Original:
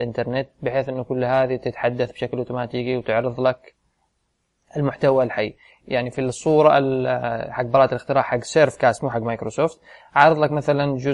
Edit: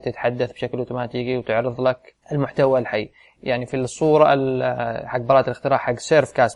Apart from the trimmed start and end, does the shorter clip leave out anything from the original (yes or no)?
yes